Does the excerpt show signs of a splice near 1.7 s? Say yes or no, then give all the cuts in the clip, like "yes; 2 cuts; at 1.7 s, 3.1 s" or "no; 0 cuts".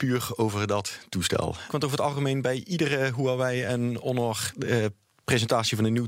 yes; 1 cut; at 1.7 s